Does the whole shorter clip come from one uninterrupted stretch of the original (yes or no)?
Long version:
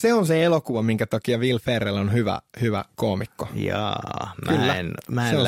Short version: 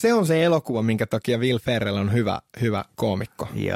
yes